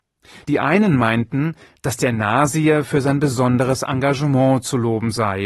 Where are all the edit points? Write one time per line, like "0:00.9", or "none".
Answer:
none